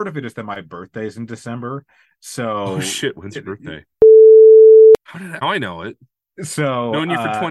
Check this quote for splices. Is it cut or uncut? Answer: cut